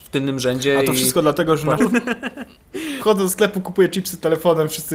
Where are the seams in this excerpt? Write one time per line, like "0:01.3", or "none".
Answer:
0:01.8
0:03.0